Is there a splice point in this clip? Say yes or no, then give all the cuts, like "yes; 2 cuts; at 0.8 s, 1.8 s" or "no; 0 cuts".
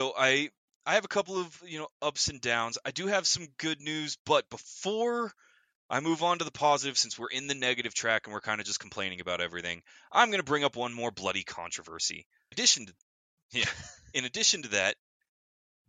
yes; 1 cut; at 12.5 s